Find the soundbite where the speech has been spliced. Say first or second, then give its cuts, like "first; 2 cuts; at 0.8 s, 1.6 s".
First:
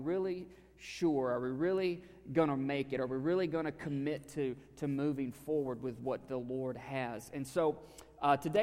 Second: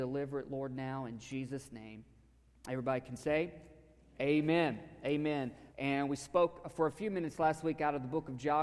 second; 1 cut; at 5.7 s